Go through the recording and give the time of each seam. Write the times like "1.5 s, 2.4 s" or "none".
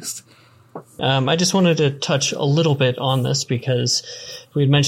1.0 s